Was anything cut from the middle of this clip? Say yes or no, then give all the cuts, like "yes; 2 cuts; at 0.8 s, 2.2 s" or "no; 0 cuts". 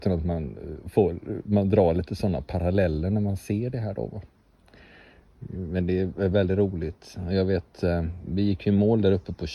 yes; 1 cut; at 6.3 s